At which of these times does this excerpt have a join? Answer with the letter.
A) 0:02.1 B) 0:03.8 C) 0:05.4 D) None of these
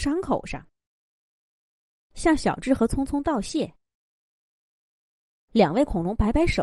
A